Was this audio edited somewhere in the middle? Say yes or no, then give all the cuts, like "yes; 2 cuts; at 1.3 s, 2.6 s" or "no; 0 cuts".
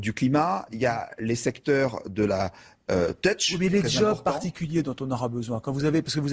no; 0 cuts